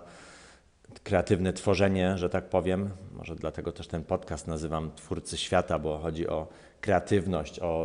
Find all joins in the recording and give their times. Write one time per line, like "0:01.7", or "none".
none